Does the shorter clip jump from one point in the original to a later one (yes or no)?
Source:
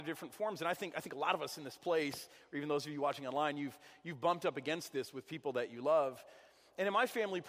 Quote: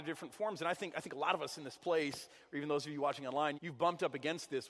yes